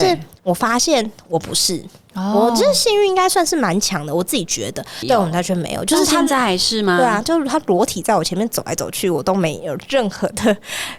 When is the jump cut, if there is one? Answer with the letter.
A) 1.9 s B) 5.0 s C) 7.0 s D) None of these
B